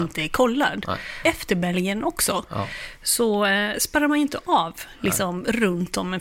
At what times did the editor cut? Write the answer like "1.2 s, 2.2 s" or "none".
1.2 s